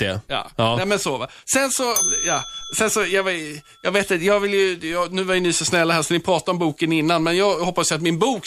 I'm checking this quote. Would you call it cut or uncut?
uncut